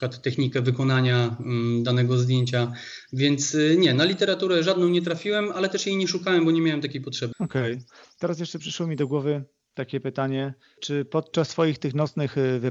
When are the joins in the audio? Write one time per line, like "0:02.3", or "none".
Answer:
0:07.3